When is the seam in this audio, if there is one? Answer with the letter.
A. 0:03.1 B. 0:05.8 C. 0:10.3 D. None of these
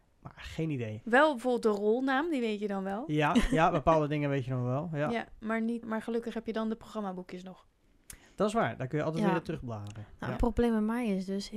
B